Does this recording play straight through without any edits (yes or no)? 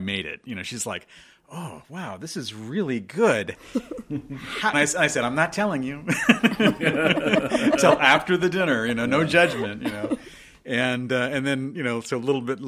no